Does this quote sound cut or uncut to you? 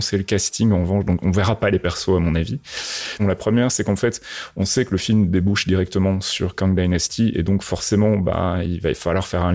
cut